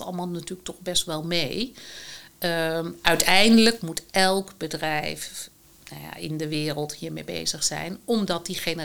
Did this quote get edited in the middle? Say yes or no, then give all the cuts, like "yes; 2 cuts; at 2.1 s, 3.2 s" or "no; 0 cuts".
no; 0 cuts